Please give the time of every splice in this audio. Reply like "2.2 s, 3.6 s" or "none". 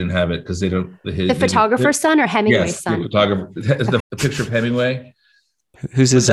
4.0 s